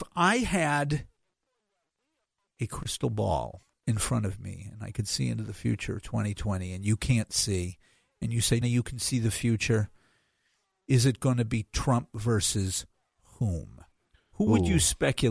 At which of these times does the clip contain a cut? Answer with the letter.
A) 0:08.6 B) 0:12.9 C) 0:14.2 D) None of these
A